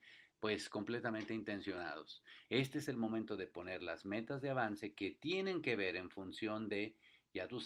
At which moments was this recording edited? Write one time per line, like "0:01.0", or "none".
0:02.5